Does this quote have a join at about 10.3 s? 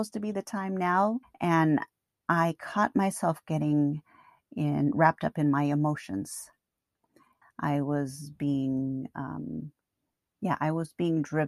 no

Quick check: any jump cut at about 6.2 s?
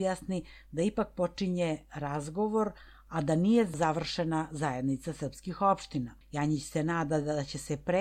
yes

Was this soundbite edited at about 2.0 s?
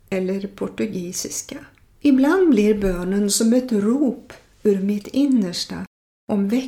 yes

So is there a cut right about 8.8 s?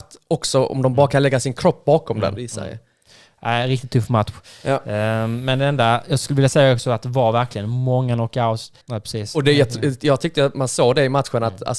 yes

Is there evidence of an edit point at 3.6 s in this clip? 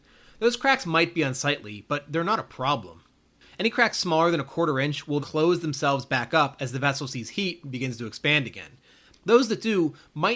no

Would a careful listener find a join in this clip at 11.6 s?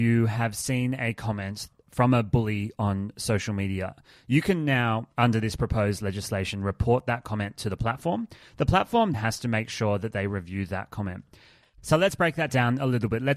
yes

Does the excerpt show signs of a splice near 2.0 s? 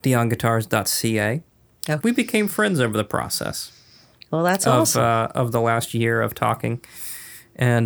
yes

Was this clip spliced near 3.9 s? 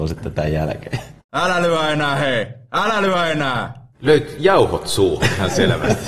yes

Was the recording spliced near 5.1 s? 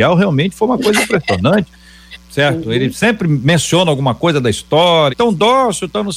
yes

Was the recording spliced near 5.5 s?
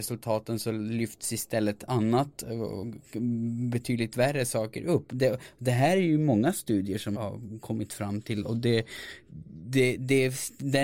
no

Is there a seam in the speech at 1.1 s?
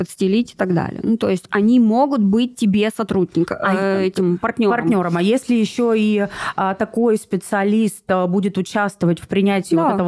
no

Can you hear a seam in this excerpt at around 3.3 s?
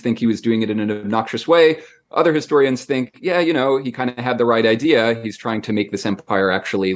no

